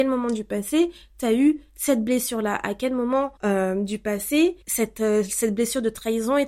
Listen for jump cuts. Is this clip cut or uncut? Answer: cut